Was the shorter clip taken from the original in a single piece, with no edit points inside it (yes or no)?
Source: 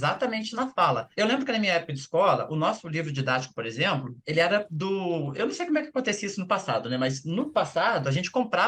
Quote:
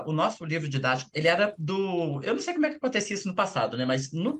no